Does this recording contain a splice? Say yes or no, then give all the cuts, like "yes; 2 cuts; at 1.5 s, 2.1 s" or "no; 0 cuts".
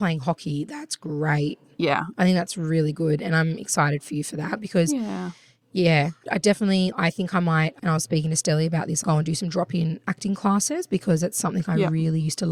no; 0 cuts